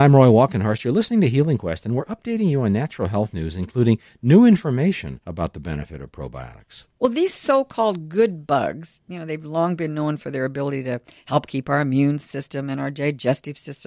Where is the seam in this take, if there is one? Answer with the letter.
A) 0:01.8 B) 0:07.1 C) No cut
C